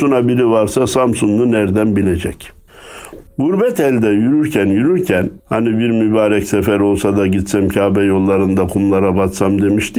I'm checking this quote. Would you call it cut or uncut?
cut